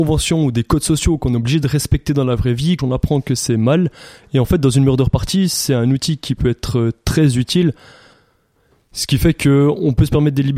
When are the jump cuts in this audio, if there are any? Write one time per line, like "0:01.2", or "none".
0:02.8